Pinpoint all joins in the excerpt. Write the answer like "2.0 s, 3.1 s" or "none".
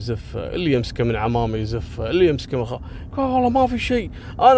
3.1 s